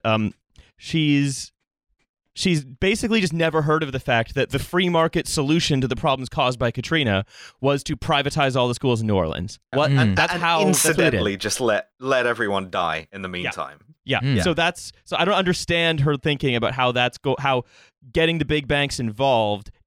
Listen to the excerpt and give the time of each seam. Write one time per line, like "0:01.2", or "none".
0:09.7